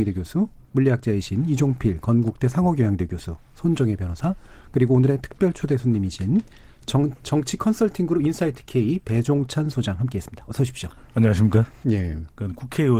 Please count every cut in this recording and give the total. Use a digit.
1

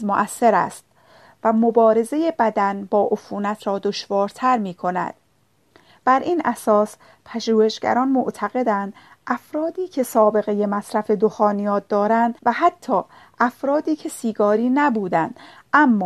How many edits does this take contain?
2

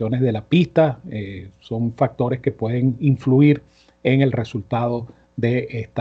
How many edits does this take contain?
0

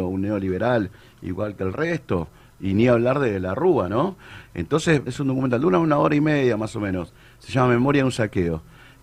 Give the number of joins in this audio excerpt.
1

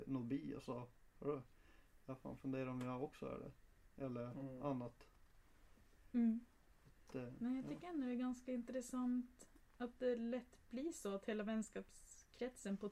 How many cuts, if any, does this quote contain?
1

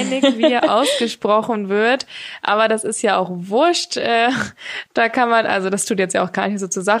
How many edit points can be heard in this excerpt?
0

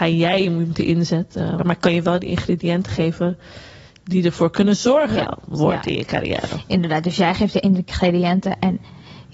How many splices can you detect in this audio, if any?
2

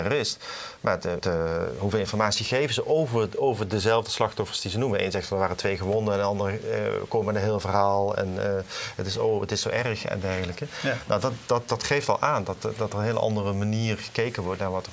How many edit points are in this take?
1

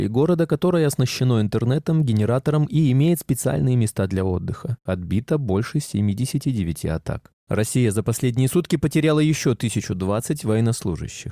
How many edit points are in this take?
1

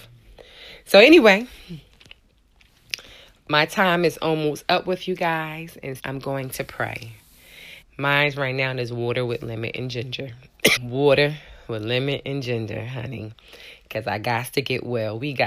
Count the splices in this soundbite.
3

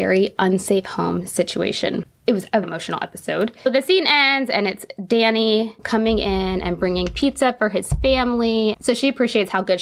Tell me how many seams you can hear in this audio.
2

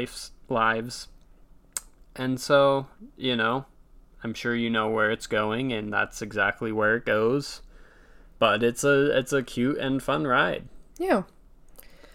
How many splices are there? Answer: 0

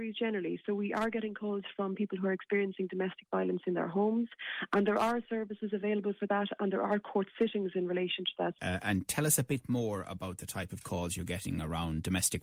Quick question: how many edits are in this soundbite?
1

